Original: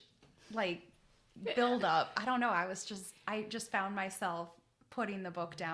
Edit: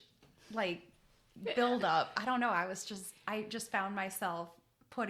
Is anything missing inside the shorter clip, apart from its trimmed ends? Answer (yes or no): no